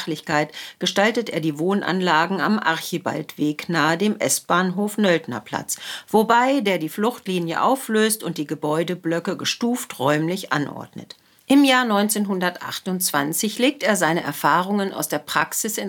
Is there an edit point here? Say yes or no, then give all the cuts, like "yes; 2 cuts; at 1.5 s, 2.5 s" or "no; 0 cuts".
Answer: yes; 1 cut; at 11.4 s